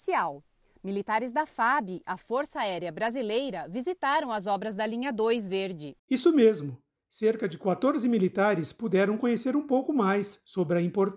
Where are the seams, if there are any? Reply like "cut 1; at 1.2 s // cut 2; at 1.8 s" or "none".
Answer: none